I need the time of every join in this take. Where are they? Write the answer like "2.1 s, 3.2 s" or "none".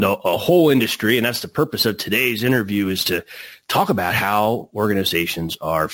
none